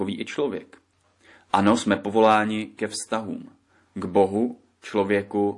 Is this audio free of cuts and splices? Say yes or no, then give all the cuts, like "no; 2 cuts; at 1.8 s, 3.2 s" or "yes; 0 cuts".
yes; 0 cuts